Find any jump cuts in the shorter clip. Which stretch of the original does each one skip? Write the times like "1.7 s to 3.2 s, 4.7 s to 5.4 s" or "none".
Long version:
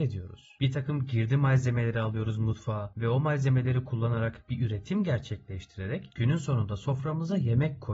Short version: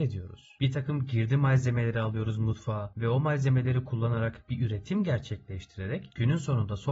none